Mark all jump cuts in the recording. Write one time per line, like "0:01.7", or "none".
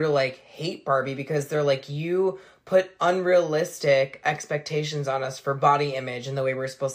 none